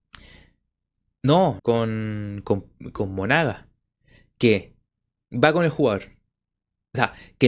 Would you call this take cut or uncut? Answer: cut